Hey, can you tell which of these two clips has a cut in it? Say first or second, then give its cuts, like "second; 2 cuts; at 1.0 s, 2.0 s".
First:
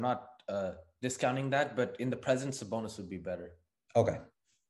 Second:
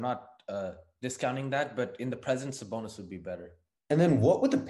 second; 1 cut; at 3.7 s